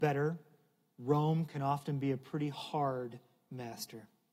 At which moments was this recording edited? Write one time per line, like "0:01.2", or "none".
none